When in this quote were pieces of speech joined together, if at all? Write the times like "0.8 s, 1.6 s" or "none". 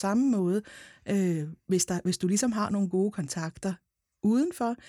none